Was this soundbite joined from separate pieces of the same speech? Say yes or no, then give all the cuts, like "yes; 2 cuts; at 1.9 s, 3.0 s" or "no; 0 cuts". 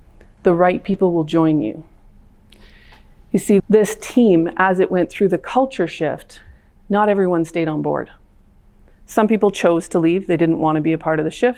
yes; 1 cut; at 3.6 s